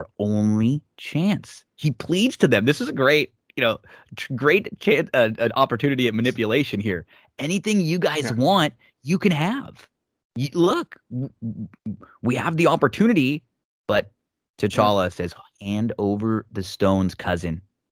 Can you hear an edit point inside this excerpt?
no; 0 cuts

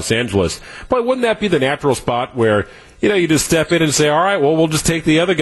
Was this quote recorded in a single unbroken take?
yes; 0 cuts

